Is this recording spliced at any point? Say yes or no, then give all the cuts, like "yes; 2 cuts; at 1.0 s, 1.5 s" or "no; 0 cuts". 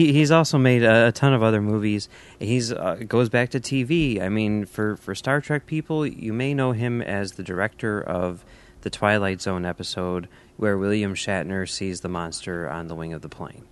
no; 0 cuts